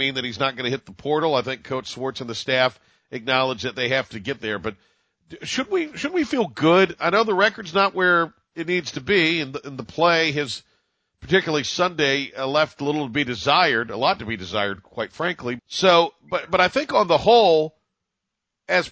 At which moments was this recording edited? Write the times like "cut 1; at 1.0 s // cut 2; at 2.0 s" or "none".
cut 1; at 15.6 s